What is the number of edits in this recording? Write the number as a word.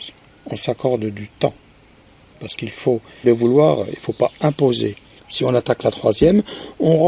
two